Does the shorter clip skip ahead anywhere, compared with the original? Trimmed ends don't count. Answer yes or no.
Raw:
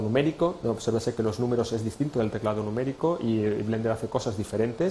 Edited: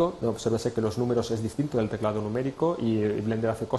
no